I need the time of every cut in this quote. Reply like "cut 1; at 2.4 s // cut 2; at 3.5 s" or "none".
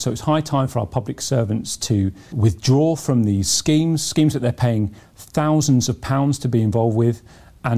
cut 1; at 2.3 s

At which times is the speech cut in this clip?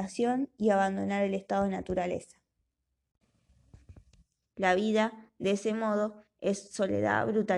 cut 1; at 4.4 s

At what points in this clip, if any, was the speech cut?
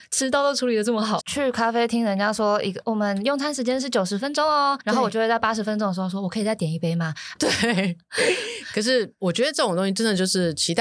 cut 1; at 1.2 s // cut 2; at 7.3 s

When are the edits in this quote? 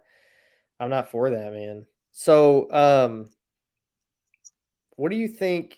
cut 1; at 1.9 s

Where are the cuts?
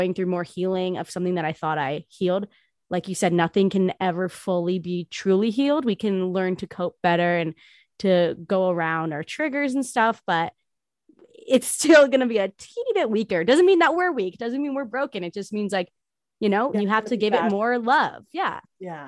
cut 1; at 16.7 s

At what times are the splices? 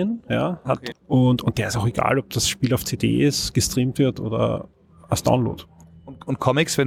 cut 1; at 0.9 s

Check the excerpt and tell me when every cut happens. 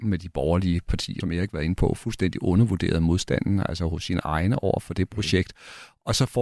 cut 1; at 1.2 s

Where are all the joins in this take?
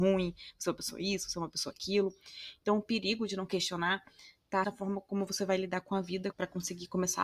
cut 1; at 4.6 s // cut 2; at 6.3 s

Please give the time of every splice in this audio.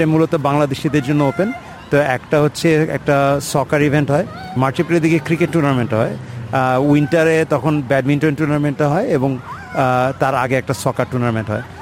cut 1; at 10.5 s

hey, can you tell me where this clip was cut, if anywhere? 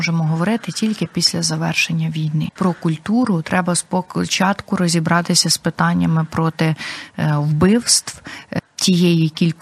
cut 1; at 2.6 s

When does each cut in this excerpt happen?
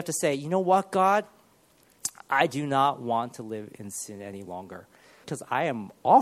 cut 1; at 5.2 s

